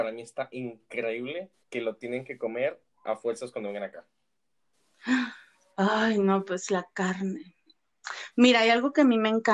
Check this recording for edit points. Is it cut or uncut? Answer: cut